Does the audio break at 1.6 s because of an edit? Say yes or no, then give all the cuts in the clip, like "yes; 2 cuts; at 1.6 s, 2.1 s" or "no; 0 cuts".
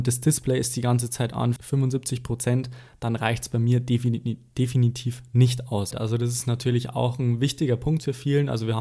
yes; 2 cuts; at 1.6 s, 5.9 s